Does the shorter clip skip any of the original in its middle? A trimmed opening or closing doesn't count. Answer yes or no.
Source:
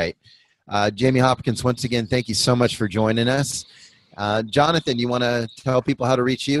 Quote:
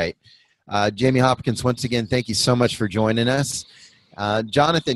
no